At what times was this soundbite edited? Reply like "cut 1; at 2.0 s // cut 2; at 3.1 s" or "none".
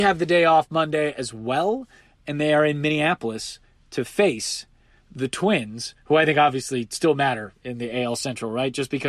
none

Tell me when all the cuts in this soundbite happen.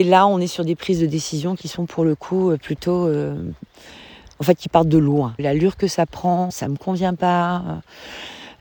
cut 1; at 5.4 s // cut 2; at 6.5 s

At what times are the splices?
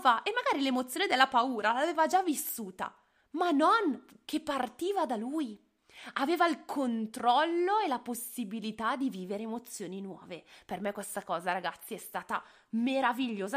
none

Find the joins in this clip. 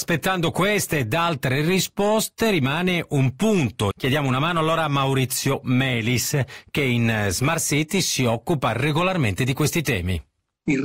cut 1; at 3.9 s

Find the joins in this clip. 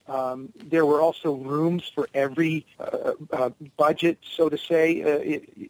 cut 1; at 2.7 s

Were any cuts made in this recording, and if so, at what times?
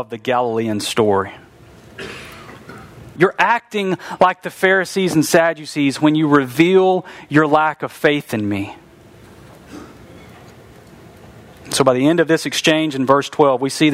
cut 1; at 3.2 s

